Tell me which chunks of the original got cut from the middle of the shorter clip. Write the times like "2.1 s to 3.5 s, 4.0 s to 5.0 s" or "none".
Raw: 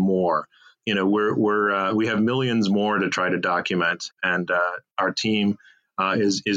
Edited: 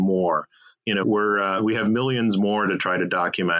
1.0 s to 1.3 s